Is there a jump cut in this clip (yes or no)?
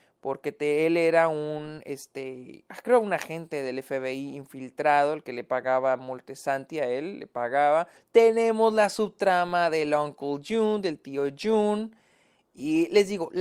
yes